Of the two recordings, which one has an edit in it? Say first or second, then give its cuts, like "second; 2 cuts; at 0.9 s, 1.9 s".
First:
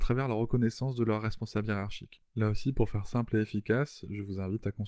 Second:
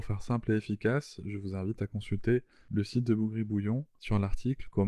first; 1 cut; at 2.2 s